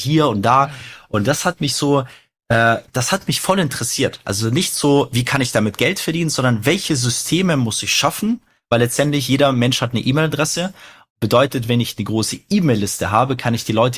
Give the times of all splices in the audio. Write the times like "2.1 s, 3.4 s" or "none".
2.9 s